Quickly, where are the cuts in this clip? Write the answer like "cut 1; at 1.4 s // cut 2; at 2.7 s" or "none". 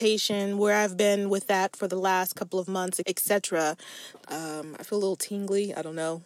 cut 1; at 3.0 s // cut 2; at 4.2 s